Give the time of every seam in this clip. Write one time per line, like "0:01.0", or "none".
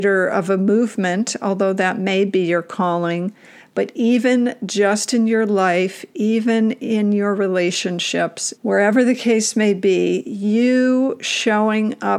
0:08.5

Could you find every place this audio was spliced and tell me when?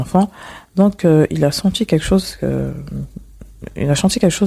none

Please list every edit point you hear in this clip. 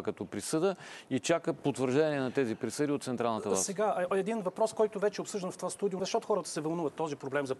0:06.0

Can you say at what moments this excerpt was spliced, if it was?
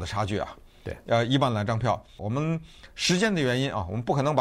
0:02.2

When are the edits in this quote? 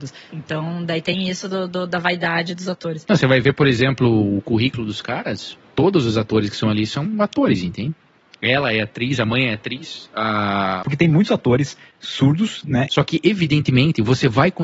0:10.8
0:12.9

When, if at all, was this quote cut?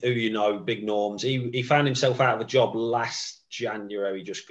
none

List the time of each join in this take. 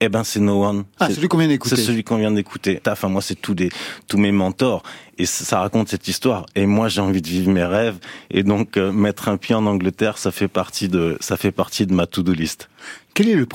0:02.8

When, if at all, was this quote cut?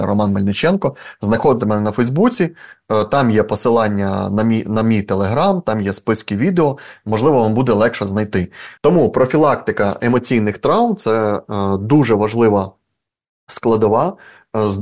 0:08.8

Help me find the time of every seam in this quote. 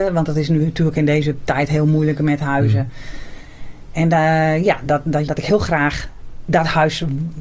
0:05.3

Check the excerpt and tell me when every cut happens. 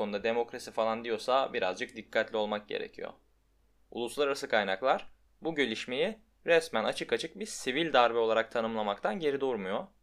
0:03.9

